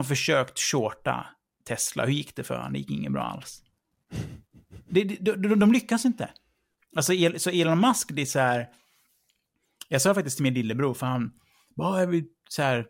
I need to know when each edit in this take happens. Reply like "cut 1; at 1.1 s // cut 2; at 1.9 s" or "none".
none